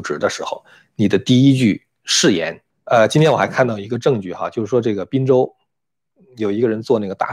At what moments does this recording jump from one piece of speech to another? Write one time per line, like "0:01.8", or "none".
0:02.7